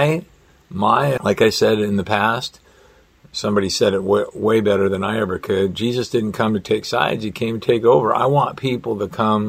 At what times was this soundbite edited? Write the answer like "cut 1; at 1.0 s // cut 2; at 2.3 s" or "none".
cut 1; at 1.2 s